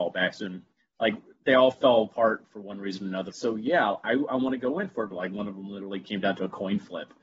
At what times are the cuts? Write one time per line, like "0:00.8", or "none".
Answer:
0:03.3
0:05.1